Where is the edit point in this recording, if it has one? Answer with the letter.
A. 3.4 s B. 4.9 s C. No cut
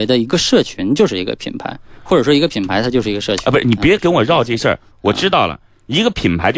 C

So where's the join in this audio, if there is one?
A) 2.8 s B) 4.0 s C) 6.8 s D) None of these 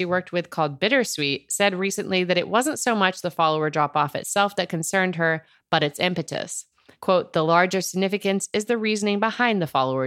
D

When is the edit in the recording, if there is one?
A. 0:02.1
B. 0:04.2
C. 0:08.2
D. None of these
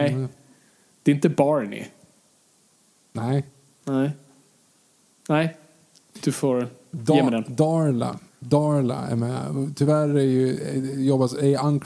D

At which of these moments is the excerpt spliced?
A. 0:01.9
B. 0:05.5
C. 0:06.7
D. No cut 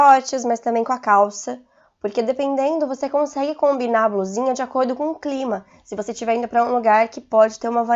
D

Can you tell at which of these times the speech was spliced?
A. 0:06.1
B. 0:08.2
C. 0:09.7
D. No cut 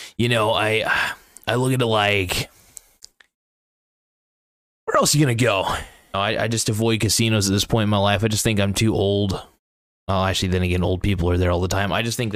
A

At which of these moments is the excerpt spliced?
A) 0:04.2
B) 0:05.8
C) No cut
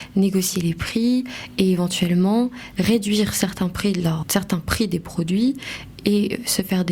A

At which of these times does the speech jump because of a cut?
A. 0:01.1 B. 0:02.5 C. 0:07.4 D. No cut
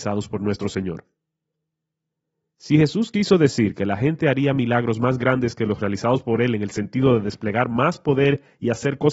D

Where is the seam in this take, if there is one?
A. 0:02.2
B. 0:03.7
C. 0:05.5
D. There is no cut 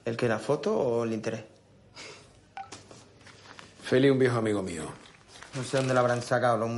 C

